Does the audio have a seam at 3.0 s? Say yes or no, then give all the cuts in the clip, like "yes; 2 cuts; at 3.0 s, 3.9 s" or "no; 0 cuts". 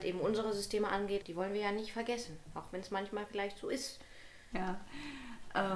no; 2 cuts; at 1.2 s, 4.5 s